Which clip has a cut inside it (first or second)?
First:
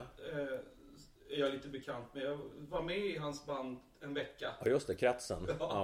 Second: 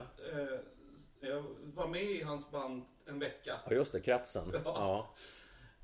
second